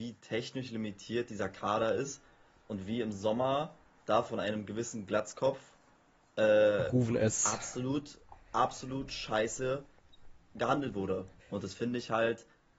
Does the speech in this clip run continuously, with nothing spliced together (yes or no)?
no